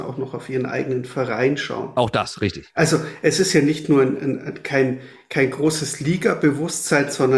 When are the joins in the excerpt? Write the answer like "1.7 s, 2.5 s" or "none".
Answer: none